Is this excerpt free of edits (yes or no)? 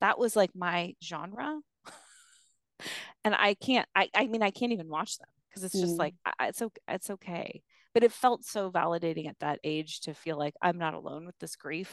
no